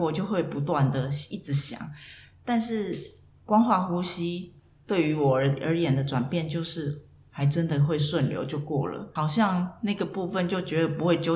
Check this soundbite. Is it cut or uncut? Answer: uncut